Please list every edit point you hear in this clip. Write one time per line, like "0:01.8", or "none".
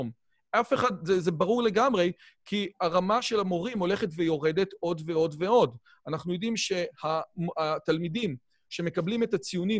none

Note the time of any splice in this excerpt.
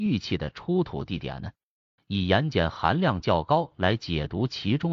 0:02.0

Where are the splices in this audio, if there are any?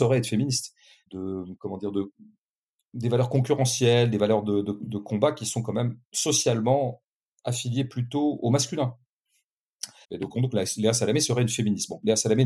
0:01.1
0:10.0

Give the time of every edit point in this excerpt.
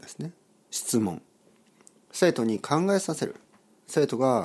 0:02.1

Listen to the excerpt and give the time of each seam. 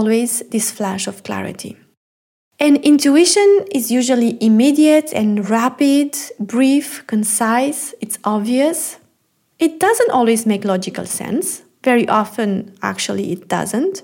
none

